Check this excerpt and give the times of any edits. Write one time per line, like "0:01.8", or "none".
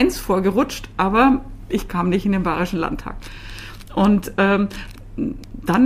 none